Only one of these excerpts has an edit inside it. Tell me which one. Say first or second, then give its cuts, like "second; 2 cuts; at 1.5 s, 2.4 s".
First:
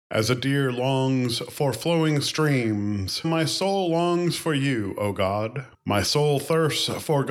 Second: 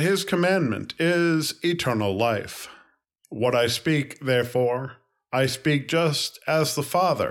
first; 1 cut; at 3.2 s